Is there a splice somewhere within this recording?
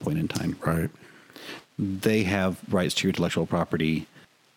yes; 1 cut; at 1.6 s

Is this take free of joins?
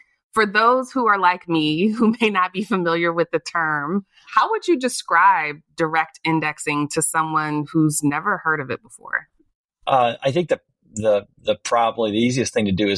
yes; 0 cuts

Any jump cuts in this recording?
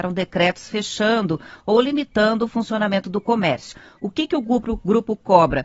no; 0 cuts

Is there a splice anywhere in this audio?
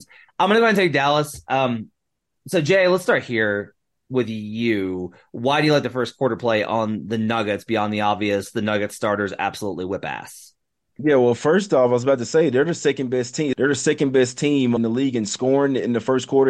yes; 2 cuts; at 13.5 s, 14.8 s

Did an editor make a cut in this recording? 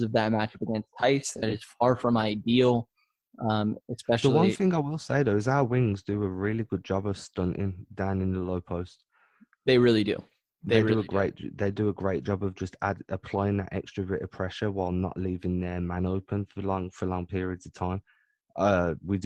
no; 0 cuts

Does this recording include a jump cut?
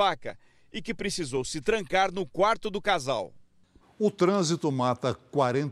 yes; 1 cut; at 3.8 s

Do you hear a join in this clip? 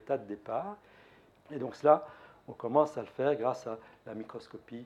yes; 1 cut; at 1.3 s

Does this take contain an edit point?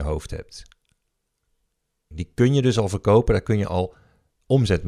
yes; 1 cut; at 2.1 s

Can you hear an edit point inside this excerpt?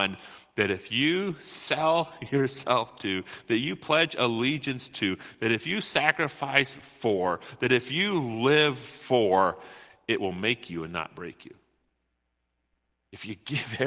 no; 0 cuts

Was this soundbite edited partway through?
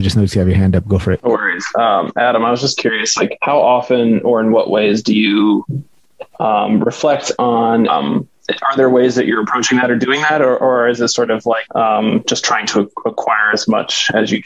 yes; 1 cut; at 7.9 s

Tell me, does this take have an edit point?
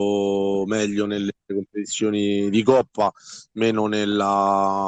no; 0 cuts

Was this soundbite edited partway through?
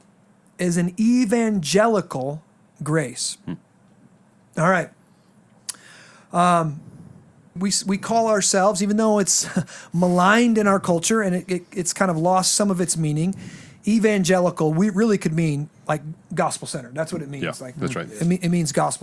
yes; 1 cut; at 7.6 s

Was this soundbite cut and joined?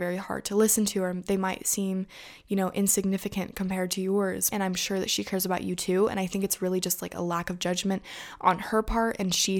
yes; 1 cut; at 4.5 s

